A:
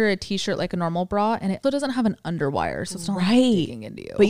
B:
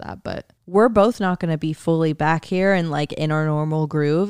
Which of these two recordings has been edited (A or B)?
A